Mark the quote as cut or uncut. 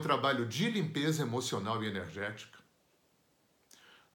uncut